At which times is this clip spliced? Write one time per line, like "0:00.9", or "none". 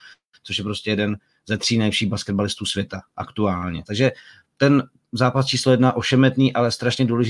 0:03.8